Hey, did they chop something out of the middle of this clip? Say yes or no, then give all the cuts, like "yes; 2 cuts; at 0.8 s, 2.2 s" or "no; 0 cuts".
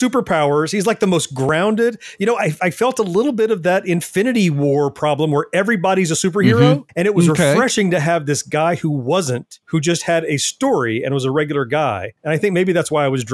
no; 0 cuts